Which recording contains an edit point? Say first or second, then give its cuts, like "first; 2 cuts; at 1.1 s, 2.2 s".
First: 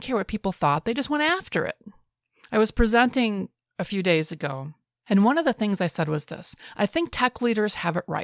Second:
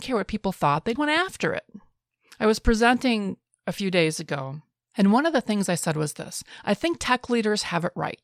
second; 1 cut; at 1.0 s